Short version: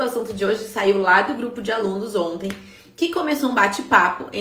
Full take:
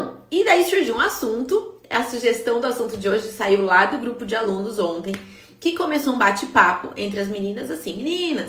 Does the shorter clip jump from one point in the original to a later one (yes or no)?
no